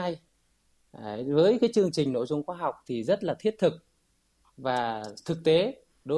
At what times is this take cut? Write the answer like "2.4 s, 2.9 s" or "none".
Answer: none